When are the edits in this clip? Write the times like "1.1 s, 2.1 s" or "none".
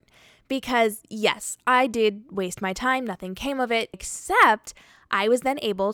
3.9 s